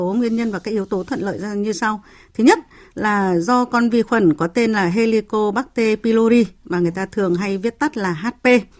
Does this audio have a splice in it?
no; 0 cuts

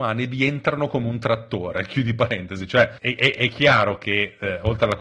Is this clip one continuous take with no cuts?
yes; 0 cuts

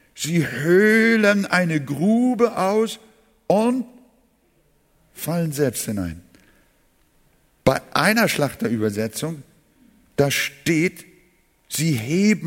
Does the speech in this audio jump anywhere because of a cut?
no; 0 cuts

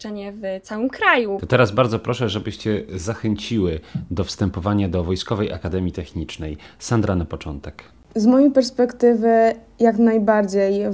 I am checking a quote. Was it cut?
no; 0 cuts

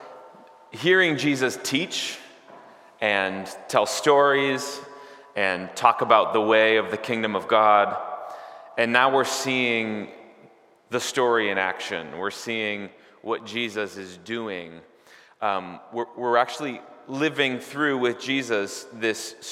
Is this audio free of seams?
yes; 0 cuts

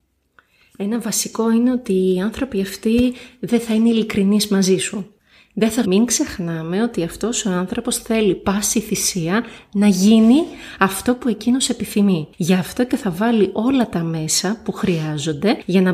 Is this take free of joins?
no; 1 cut; at 5.8 s

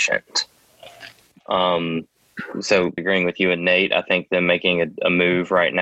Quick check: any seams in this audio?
yes; 1 cut; at 3.0 s

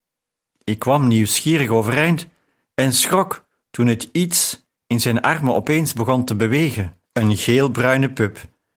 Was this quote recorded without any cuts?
no; 1 cut; at 7.1 s

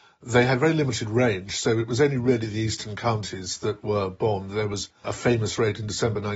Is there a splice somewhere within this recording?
yes; 1 cut; at 5.0 s

